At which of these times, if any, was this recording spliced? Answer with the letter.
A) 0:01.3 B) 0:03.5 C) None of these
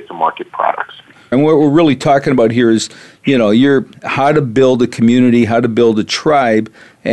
A